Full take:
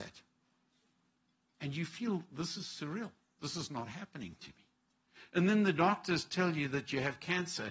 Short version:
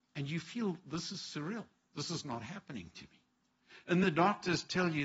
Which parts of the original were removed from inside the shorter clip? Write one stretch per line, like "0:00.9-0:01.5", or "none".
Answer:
0:05.5-0:05.7

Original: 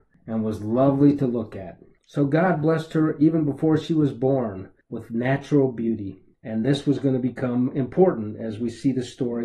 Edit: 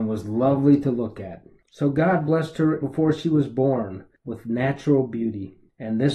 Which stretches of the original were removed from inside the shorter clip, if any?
0:03.2-0:03.5

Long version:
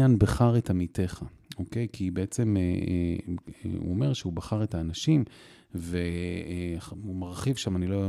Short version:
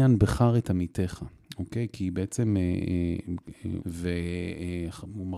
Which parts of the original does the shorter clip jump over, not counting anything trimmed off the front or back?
0:03.8-0:05.7

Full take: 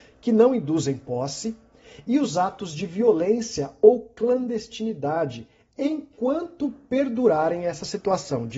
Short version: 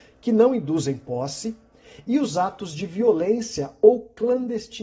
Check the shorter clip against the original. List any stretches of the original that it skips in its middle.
none

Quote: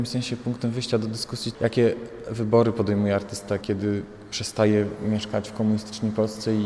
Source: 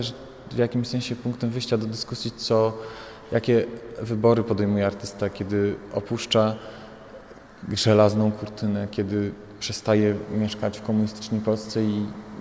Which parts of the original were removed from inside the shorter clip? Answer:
0:02.3-0:03.3
0:05.3-0:08.9

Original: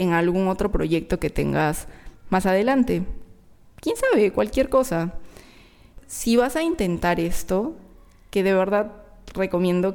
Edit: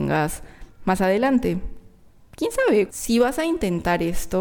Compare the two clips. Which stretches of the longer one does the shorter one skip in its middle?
0:04.3-0:06.0

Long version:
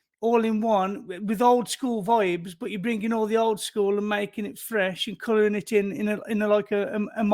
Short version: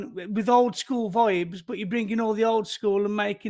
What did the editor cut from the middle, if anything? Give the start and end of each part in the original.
none

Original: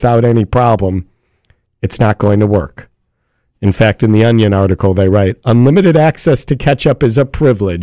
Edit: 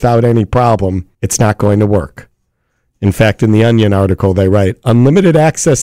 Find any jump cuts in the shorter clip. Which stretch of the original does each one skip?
0:01.1-0:01.7

